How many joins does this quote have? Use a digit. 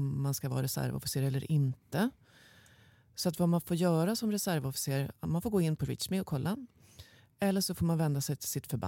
0